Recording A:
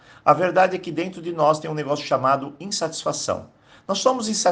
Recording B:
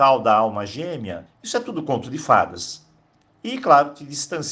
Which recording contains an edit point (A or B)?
B